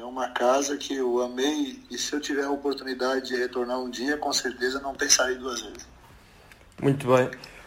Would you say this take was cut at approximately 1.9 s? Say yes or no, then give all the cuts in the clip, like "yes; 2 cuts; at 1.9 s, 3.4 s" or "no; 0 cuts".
yes; 1 cut; at 1.9 s